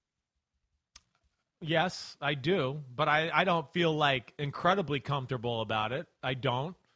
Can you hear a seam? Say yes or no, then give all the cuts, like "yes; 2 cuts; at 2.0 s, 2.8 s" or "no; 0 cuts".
no; 0 cuts